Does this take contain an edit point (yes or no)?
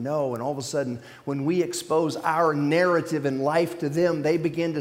no